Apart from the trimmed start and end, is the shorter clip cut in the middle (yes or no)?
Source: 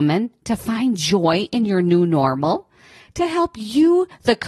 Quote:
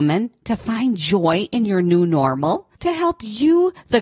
yes